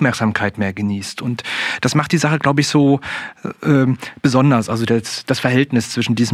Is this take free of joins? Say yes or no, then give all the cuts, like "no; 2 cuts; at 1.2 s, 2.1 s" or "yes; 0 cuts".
yes; 0 cuts